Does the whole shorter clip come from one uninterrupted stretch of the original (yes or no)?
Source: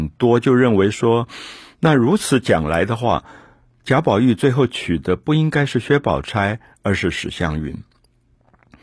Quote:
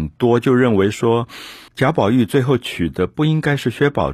no